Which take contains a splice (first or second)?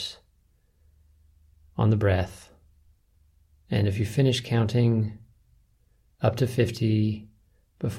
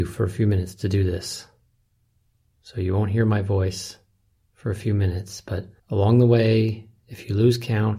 second